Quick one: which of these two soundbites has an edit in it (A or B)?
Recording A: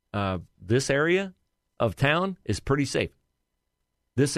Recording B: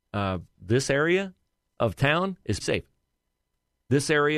B